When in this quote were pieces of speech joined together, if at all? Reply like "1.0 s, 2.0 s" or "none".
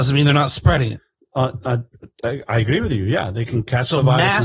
none

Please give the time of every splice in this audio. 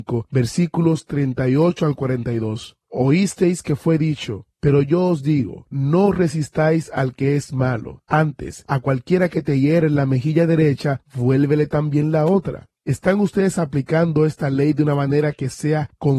4.6 s, 12.7 s

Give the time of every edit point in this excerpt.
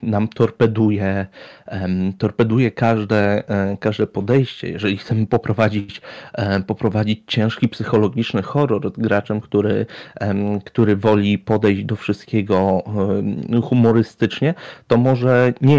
none

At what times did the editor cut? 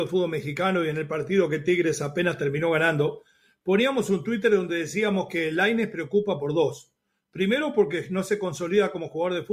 none

